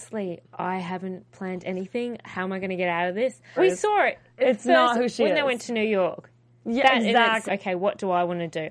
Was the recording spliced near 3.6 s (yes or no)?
yes